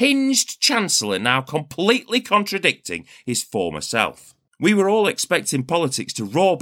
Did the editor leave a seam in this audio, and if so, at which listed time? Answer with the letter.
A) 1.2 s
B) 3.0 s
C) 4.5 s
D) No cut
C